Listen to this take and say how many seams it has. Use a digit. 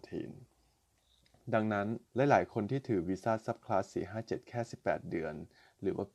1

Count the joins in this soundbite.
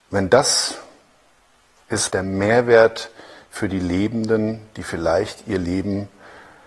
1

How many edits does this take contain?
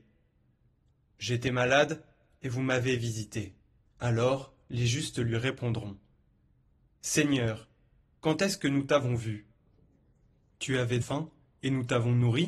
2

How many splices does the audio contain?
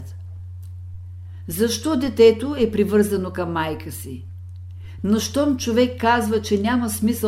1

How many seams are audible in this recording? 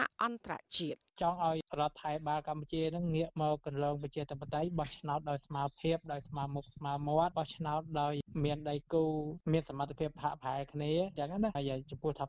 1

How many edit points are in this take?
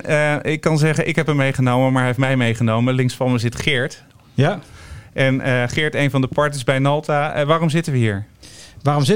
0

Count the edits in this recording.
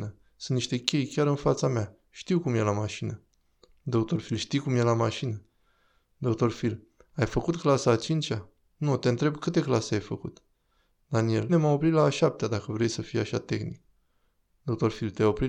1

